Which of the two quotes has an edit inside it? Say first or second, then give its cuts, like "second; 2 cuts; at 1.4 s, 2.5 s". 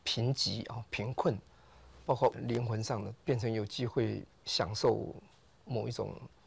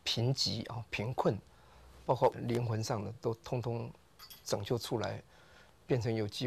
first; 1 cut; at 3.1 s